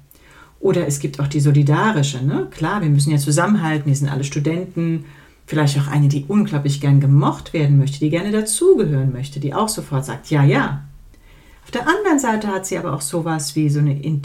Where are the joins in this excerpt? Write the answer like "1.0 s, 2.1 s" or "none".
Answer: none